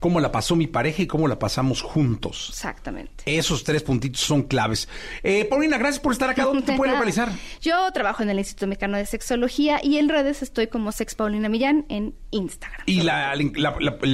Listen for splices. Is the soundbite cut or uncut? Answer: uncut